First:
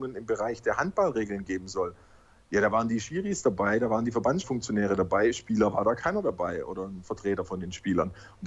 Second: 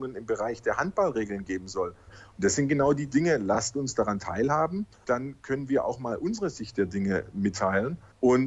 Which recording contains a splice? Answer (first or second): second